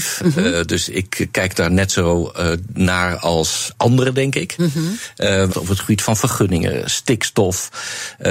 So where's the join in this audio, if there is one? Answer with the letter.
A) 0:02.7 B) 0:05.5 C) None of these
B